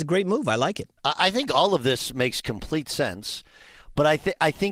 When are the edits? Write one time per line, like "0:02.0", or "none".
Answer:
0:01.0